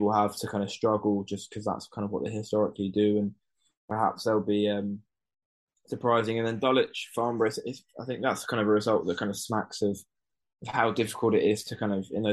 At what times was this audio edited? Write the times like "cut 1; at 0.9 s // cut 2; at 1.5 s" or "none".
none